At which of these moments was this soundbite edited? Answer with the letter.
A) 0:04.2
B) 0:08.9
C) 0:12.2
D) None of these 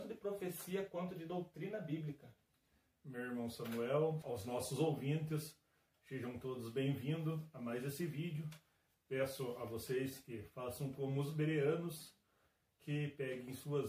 A